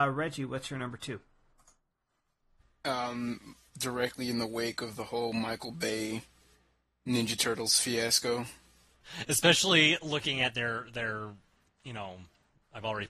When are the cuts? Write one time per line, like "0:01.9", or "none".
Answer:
0:03.7
0:09.0